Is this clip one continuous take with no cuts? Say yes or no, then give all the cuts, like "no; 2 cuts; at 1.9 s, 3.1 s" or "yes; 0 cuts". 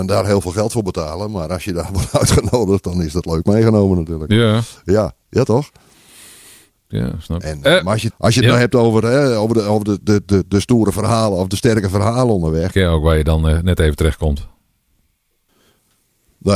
no; 2 cuts; at 8.1 s, 12.7 s